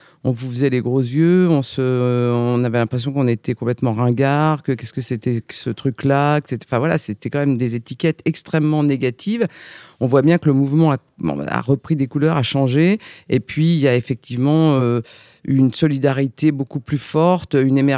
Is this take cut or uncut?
uncut